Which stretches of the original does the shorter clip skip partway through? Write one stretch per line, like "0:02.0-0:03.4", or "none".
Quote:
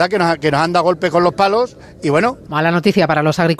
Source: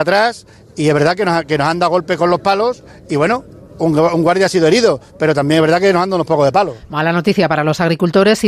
0:03.5-0:06.9